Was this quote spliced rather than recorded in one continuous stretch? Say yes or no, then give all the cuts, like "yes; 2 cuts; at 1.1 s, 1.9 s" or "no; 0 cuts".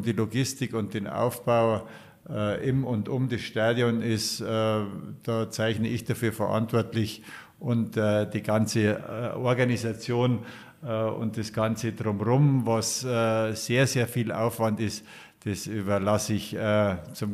no; 0 cuts